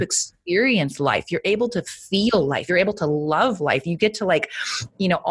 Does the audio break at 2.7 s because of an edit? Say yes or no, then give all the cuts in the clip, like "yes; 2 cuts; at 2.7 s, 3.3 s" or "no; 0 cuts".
no; 0 cuts